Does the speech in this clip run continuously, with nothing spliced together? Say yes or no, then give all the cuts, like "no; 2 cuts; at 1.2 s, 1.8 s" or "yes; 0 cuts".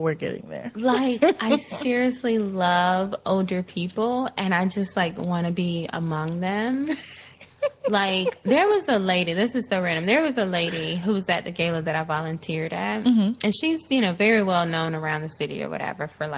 yes; 0 cuts